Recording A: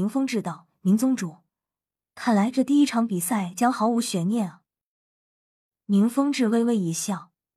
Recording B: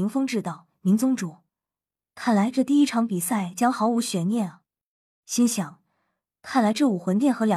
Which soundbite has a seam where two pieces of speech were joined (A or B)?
B